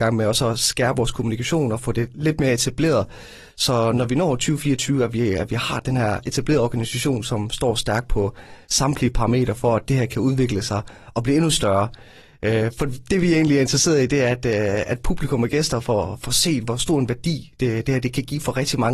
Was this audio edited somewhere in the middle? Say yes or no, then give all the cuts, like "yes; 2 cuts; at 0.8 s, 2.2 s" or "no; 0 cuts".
no; 0 cuts